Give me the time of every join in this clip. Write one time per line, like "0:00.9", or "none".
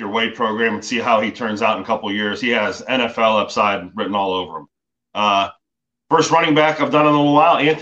none

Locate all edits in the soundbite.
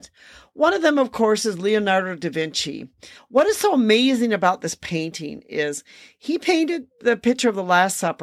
0:03.2

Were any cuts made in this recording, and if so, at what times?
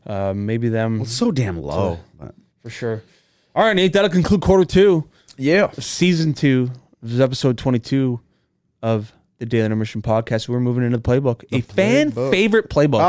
none

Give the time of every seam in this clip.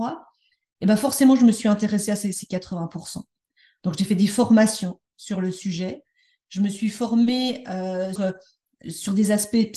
0:08.2

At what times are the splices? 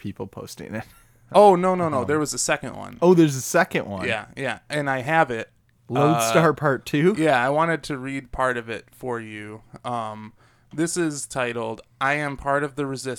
none

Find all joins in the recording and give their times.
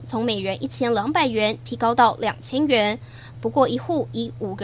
0:03.3

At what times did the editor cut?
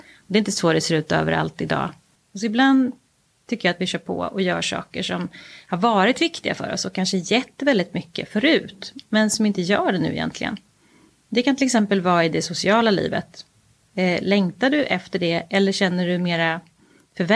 0:02.2

